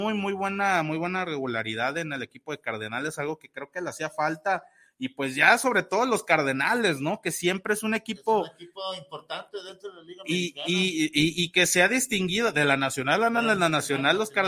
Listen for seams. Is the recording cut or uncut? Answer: uncut